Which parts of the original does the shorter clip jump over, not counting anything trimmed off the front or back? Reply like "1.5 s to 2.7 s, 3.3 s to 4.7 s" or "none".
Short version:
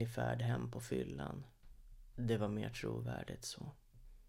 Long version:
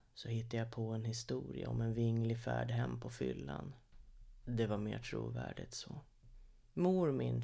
none